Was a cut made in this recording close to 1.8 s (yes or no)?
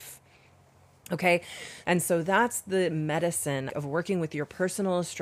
yes